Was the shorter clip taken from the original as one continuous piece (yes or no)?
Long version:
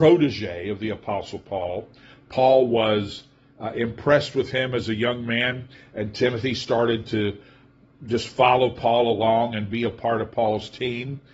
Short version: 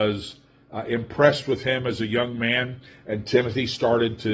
yes